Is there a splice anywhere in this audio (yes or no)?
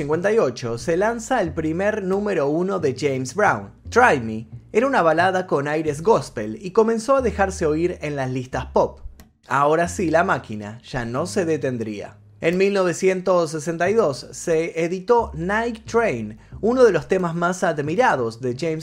yes